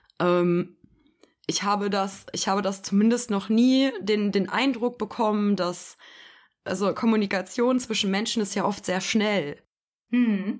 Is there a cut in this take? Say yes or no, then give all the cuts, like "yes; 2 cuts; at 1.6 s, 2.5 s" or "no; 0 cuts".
no; 0 cuts